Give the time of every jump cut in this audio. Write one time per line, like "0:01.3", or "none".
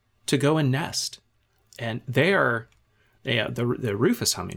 none